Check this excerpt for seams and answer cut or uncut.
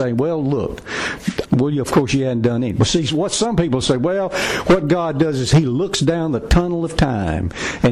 cut